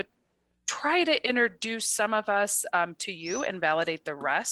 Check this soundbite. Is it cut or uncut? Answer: uncut